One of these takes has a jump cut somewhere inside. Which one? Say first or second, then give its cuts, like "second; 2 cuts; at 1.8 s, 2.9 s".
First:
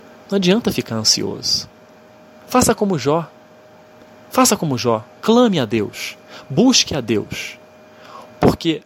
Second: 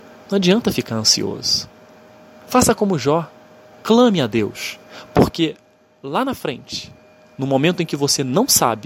second; 2 cuts; at 3.7 s, 5.1 s